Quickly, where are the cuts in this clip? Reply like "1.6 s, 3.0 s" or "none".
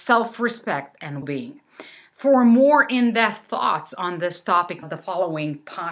1.2 s, 4.8 s